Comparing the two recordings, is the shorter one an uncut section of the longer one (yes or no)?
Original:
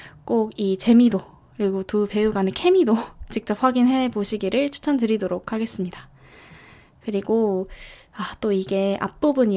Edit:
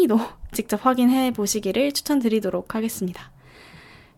yes